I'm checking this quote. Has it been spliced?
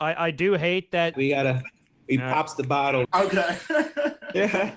yes; 2 cuts; at 1.1 s, 3.0 s

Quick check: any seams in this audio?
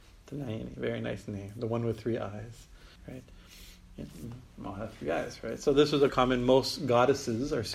yes; 2 cuts; at 3.0 s, 6.1 s

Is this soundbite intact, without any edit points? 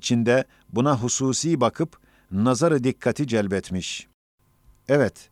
yes; 0 cuts

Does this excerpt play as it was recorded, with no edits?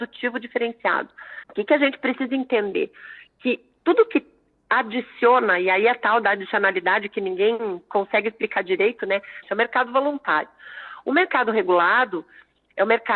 no; 1 cut; at 9.4 s

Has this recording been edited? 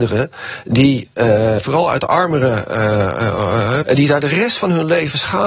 yes; 2 cuts; at 1.6 s, 3.8 s

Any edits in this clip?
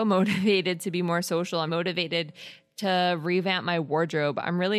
yes; 1 cut; at 1.7 s

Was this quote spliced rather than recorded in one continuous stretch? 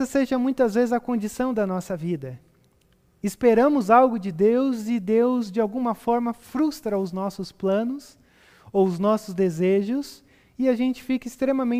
no; 0 cuts

